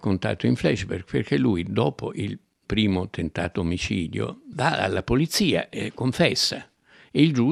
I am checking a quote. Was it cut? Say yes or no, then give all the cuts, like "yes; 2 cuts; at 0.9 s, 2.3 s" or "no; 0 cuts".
yes; 1 cut; at 4.5 s